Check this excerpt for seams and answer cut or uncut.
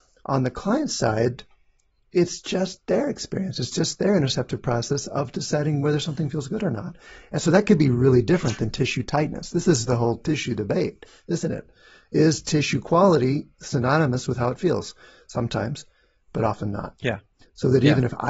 uncut